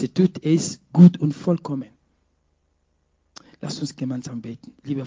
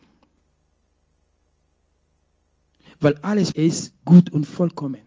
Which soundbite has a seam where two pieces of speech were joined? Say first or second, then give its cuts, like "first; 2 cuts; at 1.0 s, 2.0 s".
second; 1 cut; at 3.5 s